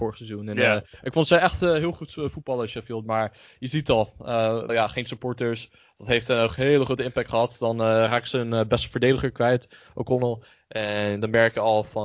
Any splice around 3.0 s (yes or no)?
no